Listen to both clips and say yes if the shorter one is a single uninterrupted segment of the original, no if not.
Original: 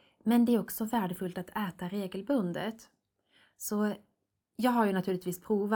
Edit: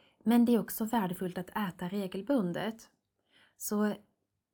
yes